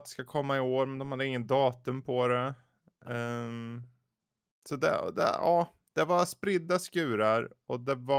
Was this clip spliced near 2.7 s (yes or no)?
no